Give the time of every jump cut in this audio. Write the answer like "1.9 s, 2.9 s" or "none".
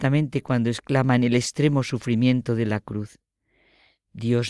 none